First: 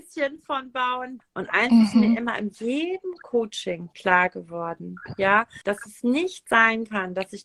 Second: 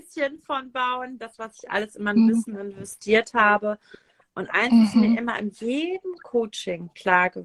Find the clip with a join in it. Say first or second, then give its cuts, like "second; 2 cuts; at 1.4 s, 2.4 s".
first; 2 cuts; at 1.2 s, 5.6 s